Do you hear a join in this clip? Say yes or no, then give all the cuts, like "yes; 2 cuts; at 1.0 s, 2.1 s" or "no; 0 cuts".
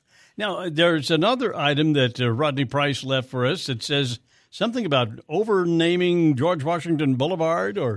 no; 0 cuts